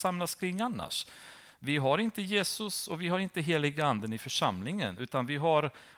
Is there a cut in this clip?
no; 0 cuts

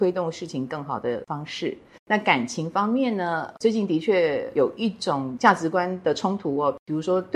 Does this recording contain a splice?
yes; 1 cut; at 2.0 s

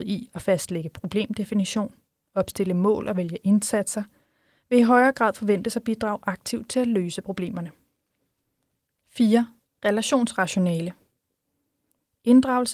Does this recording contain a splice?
no; 0 cuts

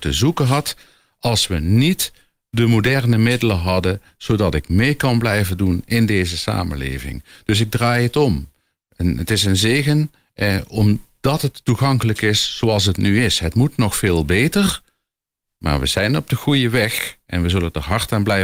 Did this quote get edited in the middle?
no; 0 cuts

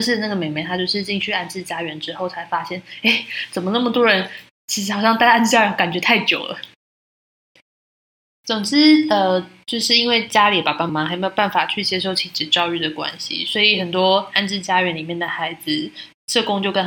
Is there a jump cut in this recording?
yes; 1 cut; at 10.9 s

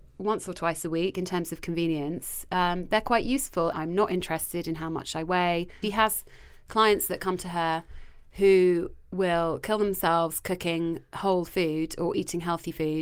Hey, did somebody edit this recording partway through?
yes; 2 cuts; at 3.7 s, 5.8 s

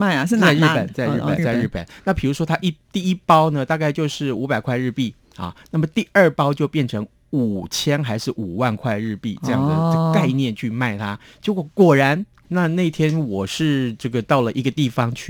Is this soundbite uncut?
no; 2 cuts; at 1.4 s, 12.4 s

